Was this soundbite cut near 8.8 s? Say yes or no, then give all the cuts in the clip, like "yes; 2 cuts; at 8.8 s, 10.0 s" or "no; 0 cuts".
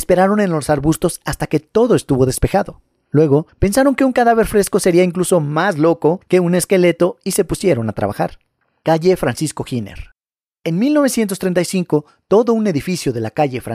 yes; 1 cut; at 8.8 s